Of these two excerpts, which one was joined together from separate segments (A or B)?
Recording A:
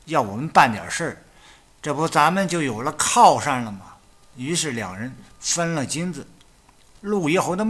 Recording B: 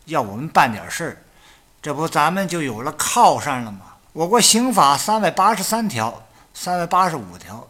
B